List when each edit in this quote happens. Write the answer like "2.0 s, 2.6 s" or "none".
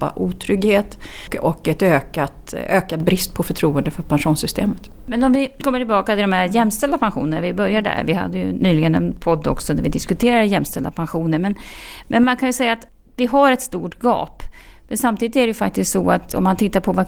none